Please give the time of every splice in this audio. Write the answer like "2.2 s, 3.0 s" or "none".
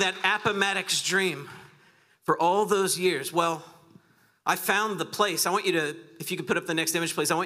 none